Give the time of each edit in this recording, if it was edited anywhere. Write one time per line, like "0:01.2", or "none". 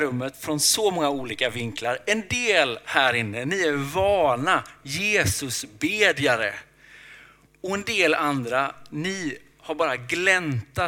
none